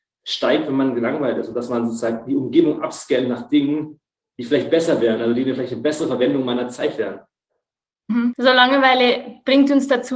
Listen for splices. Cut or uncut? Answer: uncut